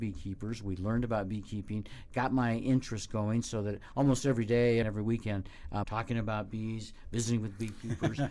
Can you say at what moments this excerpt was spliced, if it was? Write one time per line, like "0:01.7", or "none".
0:04.8
0:05.8